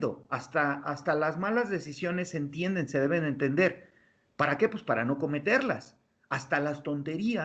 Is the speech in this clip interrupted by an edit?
no; 0 cuts

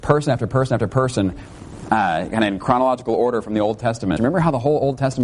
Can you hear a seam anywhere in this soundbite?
yes; 1 cut; at 4.2 s

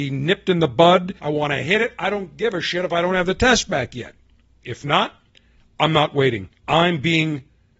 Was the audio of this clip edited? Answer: yes; 3 cuts; at 1.2 s, 4.6 s, 6.6 s

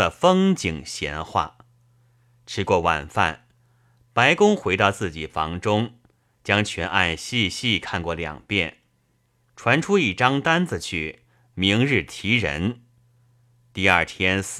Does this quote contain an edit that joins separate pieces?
no; 0 cuts

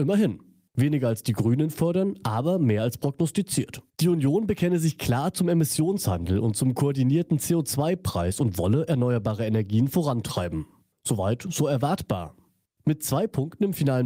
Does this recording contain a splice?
yes; 1 cut; at 3.9 s

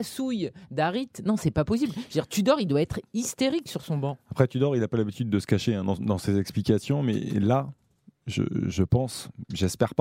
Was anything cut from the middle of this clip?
no; 0 cuts

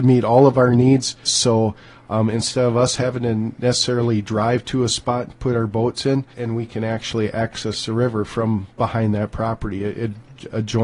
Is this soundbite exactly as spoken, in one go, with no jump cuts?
no; 2 cuts; at 1.3 s, 6.3 s

